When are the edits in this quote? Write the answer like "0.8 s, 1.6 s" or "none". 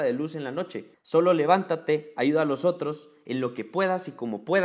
0.9 s